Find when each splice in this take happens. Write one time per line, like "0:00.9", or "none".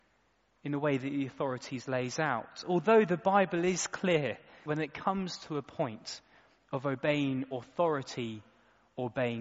0:04.7